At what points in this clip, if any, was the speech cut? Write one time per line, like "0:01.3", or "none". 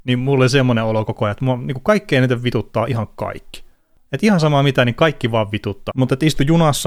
0:05.9